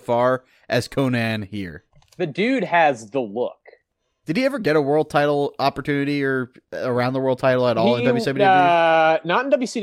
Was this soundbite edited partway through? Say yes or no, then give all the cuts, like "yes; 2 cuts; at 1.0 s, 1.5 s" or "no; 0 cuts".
yes; 1 cut; at 4.2 s